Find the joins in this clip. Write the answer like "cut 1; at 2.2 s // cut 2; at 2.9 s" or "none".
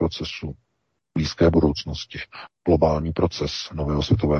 cut 1; at 2.5 s